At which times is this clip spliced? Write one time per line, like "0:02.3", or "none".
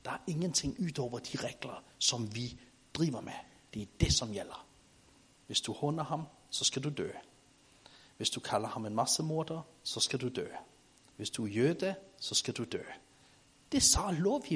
0:05.4